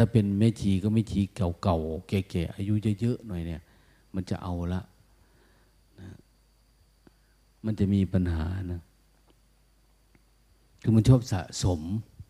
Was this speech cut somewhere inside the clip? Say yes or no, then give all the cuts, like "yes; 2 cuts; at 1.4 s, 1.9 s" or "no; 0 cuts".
no; 0 cuts